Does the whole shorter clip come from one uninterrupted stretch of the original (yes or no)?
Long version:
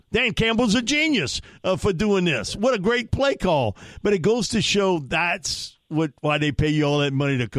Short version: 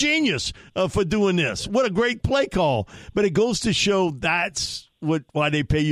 yes